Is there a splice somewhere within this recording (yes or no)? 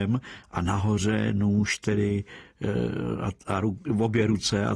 no